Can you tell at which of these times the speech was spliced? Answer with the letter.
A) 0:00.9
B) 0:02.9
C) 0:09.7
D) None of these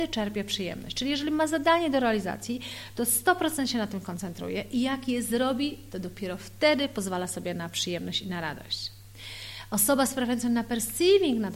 D